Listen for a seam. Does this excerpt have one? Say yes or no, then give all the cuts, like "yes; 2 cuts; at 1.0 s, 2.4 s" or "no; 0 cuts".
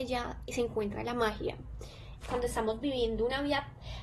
yes; 1 cut; at 2.2 s